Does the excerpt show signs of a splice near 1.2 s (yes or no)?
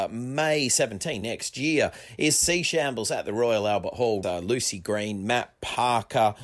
yes